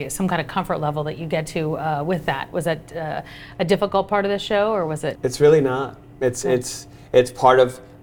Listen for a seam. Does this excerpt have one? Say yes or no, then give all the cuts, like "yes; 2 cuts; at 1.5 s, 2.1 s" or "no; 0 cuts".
yes; 1 cut; at 5.1 s